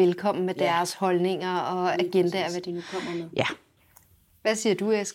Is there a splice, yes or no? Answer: no